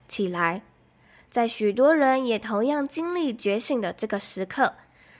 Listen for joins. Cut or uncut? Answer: uncut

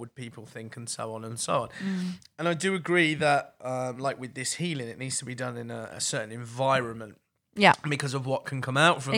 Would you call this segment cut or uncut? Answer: uncut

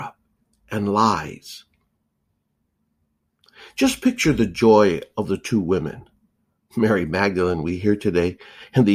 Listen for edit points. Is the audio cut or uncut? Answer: uncut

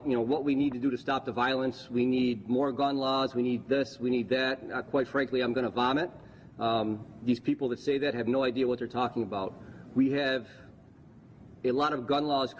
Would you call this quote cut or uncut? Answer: uncut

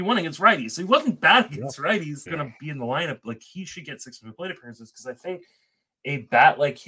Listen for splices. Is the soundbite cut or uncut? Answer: cut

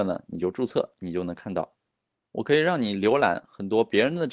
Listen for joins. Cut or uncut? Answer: cut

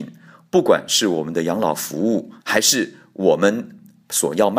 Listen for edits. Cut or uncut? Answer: cut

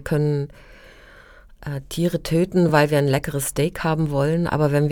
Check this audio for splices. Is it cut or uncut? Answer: uncut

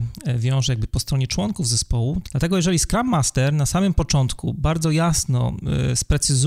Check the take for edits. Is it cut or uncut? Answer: cut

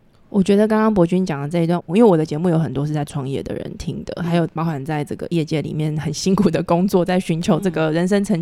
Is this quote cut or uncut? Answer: uncut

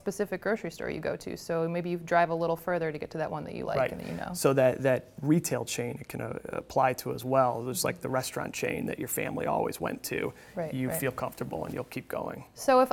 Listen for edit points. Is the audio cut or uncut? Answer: uncut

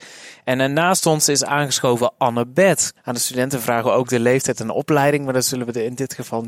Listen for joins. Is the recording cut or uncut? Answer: cut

